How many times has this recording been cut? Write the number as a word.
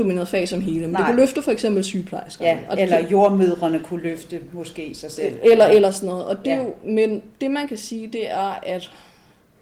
zero